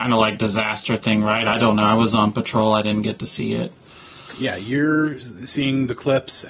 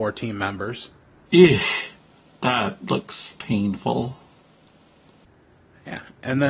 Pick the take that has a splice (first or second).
second